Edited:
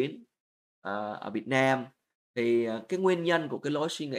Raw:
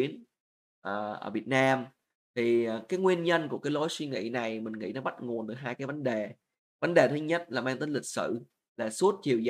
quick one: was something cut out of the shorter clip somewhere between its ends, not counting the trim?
no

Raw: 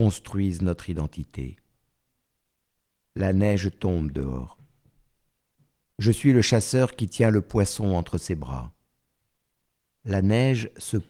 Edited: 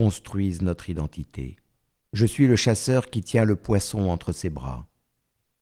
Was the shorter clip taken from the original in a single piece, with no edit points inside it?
no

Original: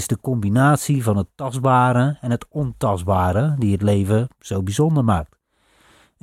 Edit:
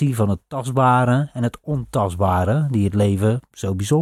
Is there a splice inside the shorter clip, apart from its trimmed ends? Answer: no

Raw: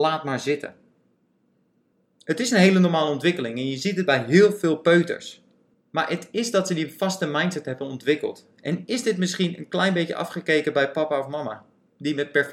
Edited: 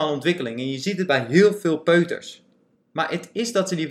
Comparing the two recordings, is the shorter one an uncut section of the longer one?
yes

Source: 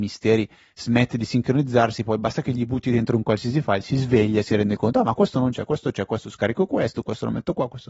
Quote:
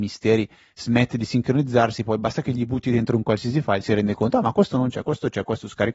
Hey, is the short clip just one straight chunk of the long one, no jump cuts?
no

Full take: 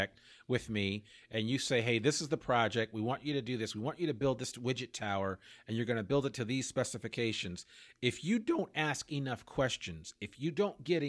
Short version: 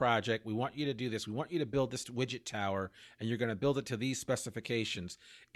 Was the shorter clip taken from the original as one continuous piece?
yes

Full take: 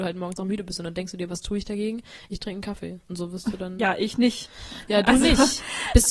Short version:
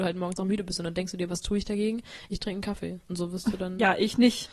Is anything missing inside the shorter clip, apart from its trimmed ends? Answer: no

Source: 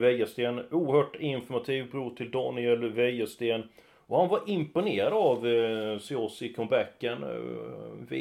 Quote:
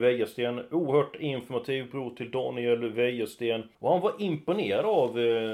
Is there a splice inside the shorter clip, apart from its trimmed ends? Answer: yes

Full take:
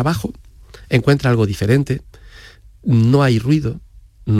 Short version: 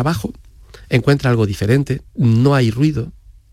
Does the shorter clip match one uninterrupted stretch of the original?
no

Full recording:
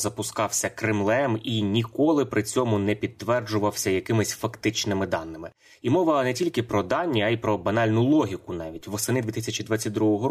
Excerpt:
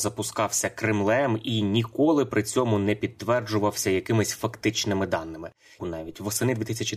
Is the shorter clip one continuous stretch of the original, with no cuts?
no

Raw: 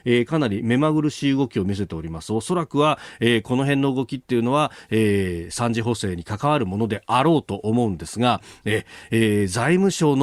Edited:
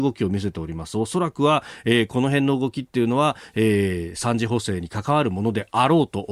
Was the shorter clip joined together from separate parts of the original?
no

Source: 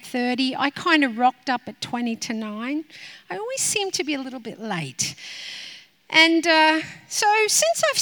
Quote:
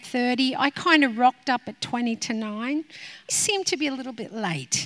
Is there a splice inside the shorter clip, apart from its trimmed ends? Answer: yes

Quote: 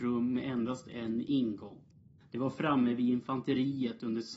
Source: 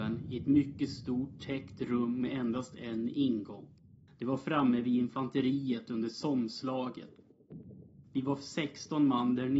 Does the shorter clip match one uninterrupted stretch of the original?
yes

